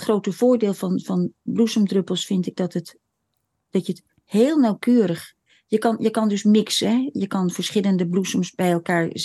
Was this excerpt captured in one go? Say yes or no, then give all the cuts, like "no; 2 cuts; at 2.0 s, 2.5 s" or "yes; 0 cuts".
yes; 0 cuts